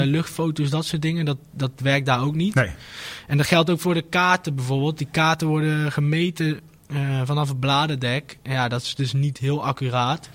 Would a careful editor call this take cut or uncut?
uncut